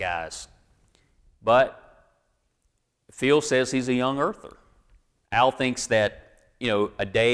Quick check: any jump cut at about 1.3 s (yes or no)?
no